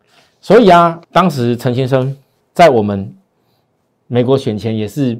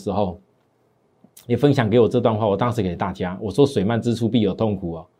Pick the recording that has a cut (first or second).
first